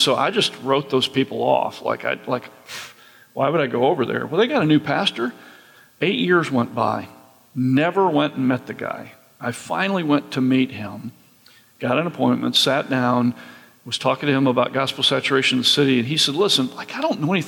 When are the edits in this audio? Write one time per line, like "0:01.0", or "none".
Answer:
none